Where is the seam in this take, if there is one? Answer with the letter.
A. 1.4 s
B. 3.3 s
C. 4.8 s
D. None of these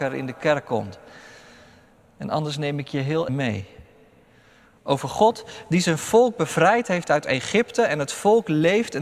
B